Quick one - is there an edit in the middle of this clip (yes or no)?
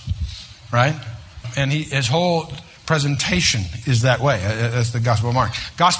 yes